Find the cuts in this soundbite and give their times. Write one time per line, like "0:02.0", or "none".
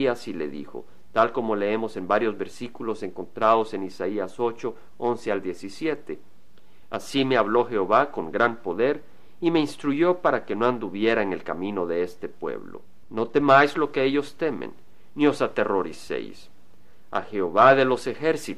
0:13.0

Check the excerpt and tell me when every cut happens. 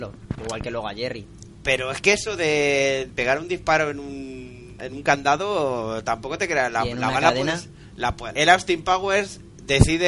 0:04.8
0:08.3

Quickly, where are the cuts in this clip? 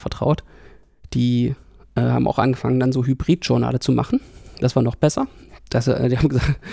none

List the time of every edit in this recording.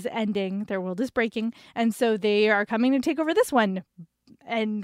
none

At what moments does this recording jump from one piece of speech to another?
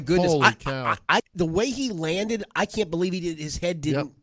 0:01.2

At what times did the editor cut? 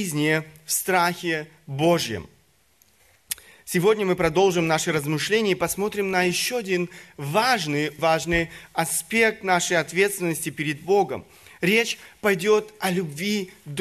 0:08.0

